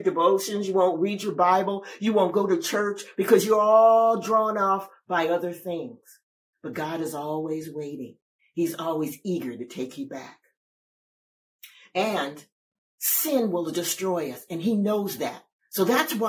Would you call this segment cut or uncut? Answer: cut